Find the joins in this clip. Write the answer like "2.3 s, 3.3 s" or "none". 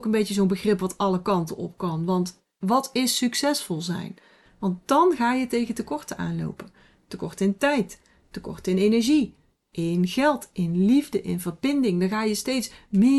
4.5 s